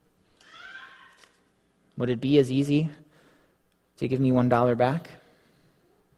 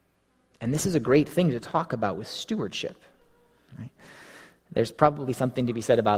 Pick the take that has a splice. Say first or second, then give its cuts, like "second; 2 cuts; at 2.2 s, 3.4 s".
second; 1 cut; at 3.7 s